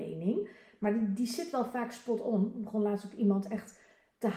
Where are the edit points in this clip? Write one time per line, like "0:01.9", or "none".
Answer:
none